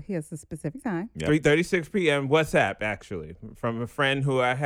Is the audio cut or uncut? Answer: uncut